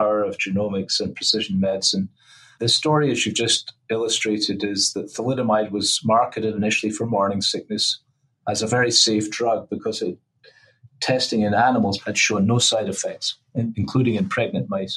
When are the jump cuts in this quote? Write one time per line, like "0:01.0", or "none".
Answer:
0:12.0